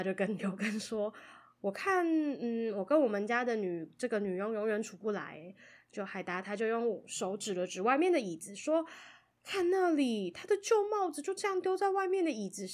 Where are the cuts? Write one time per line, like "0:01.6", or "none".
none

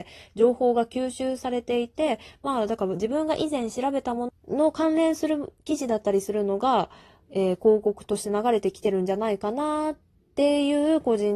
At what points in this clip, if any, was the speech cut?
0:04.3

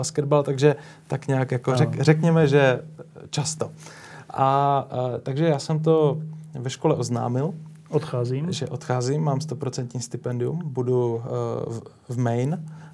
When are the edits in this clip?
none

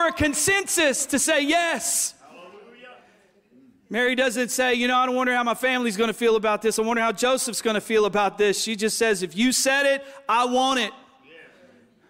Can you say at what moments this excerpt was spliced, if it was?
none

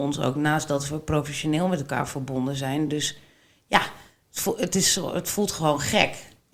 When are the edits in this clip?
none

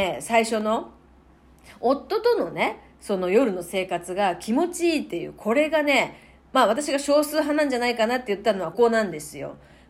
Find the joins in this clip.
0:08.7

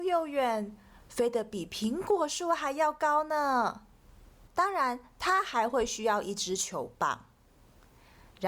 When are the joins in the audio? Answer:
0:04.5

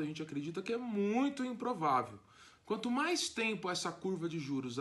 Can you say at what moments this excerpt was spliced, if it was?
0:02.6

